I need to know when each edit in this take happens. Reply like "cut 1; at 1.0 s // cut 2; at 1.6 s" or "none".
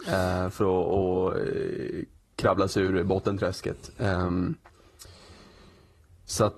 none